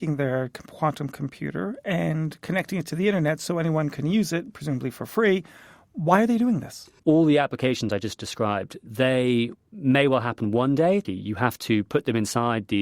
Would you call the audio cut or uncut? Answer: cut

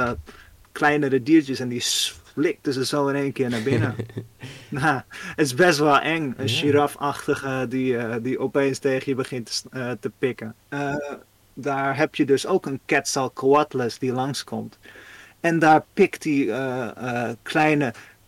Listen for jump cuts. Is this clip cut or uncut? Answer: cut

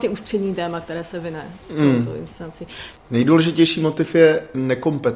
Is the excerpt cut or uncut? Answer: cut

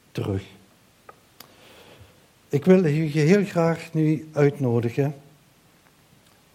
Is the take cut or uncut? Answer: uncut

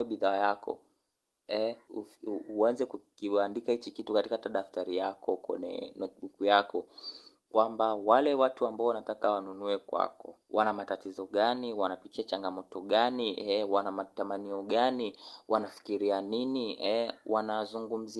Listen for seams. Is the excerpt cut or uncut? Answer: cut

